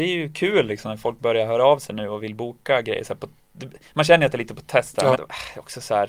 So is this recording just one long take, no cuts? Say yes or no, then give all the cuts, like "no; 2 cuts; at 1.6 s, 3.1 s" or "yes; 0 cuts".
no; 1 cut; at 5.1 s